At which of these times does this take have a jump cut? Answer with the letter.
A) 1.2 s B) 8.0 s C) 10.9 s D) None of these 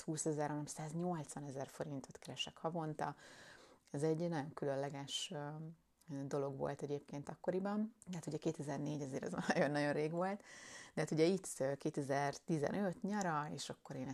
B